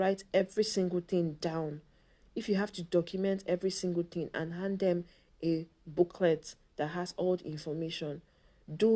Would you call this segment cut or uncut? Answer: uncut